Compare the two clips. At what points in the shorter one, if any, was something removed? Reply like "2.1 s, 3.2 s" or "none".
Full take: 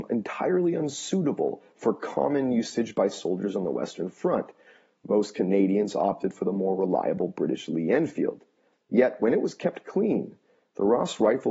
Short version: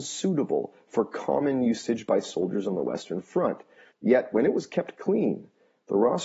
3.9 s